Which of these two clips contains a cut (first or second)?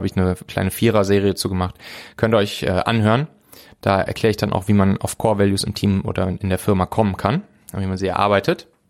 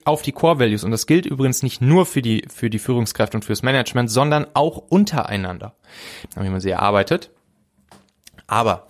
second